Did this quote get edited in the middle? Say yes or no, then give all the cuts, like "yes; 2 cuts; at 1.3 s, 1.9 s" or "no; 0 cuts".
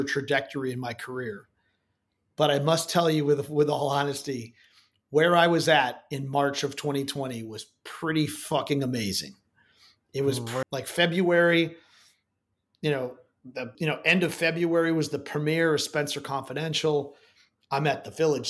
yes; 2 cuts; at 10.6 s, 13.7 s